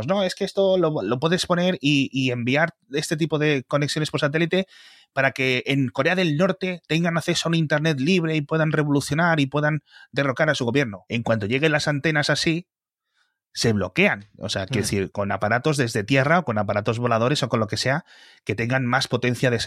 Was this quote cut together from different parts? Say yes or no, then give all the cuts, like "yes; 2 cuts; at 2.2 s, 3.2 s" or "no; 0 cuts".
no; 0 cuts